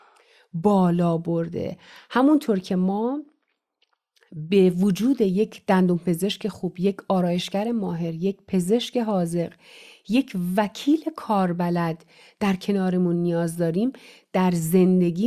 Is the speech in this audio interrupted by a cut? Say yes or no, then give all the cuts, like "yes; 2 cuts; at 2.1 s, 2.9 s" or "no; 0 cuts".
no; 0 cuts